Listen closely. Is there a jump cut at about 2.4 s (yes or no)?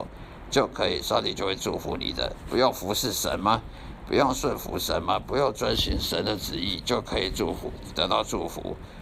no